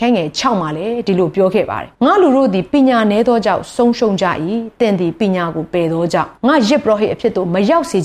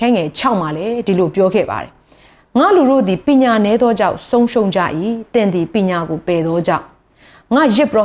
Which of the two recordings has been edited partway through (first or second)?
first